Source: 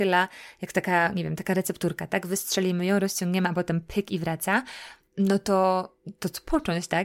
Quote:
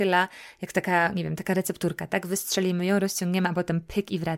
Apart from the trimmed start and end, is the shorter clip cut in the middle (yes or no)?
no